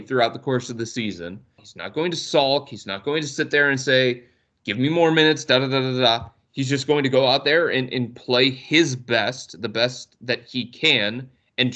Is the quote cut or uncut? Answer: cut